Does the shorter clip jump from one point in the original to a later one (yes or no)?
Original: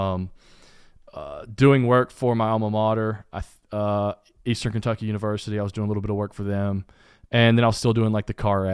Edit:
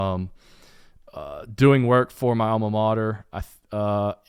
no